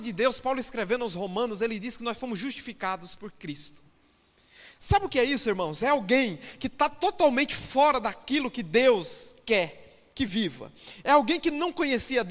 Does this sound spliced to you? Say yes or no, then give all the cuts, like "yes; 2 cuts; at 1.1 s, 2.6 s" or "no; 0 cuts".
no; 0 cuts